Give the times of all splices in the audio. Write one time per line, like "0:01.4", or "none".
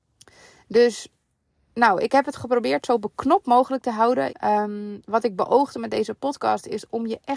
0:04.3